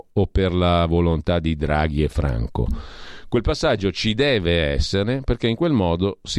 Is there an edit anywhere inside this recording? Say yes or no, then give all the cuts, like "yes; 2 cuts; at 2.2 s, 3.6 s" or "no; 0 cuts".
no; 0 cuts